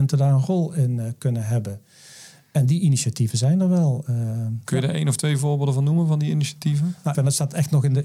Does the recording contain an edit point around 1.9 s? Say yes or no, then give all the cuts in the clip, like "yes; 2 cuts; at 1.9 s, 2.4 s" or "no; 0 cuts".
no; 1 cut; at 7.1 s